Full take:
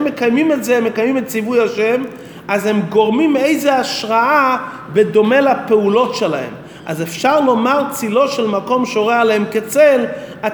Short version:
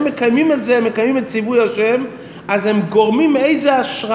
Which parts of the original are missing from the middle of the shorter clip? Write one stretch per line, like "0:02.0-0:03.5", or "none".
none